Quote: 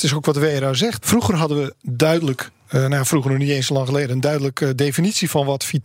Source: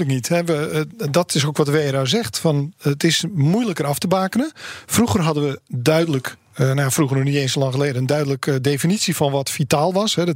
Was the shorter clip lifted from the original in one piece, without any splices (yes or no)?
no